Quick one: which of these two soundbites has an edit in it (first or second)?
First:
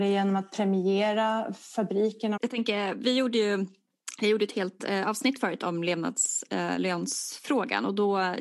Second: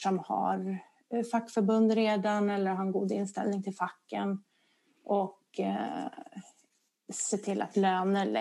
first